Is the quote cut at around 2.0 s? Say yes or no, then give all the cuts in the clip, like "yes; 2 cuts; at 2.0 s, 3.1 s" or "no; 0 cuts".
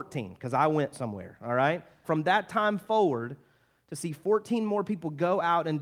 yes; 1 cut; at 2.0 s